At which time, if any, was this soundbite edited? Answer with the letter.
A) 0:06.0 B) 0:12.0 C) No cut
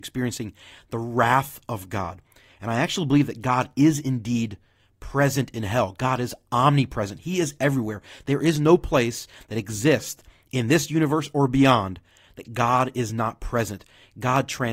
C